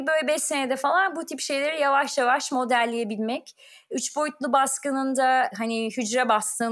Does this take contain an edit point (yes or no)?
no